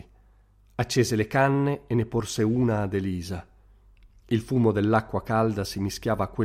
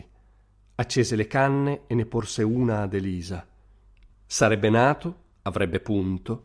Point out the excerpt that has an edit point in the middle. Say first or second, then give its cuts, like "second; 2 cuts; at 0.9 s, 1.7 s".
second; 1 cut; at 4.1 s